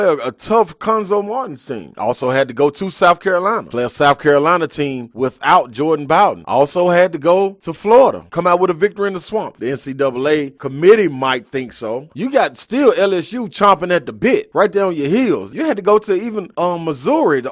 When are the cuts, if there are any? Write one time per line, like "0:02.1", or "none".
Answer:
0:09.6
0:12.1
0:15.5